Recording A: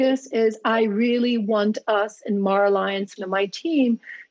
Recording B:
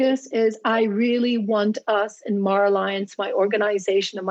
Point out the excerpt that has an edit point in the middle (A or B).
A